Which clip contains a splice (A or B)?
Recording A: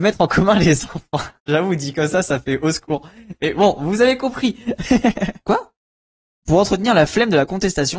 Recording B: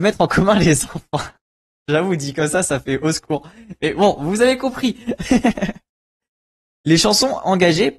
A